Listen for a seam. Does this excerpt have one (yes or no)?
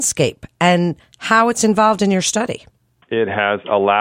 yes